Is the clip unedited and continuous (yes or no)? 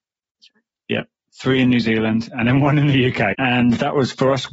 no